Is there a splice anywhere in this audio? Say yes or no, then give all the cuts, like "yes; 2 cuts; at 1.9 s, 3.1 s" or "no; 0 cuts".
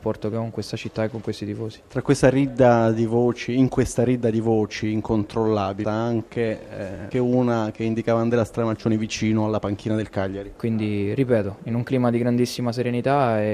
yes; 3 cuts; at 5.8 s, 7.1 s, 10.6 s